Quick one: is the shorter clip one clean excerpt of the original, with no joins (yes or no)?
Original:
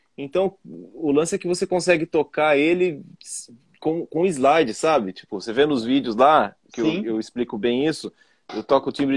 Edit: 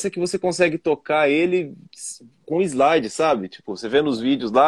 no